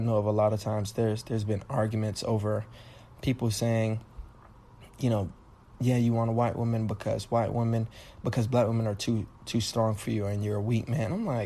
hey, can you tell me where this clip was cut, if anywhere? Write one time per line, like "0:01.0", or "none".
none